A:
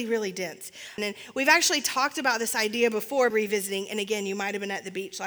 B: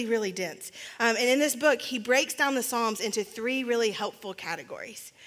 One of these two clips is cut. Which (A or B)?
A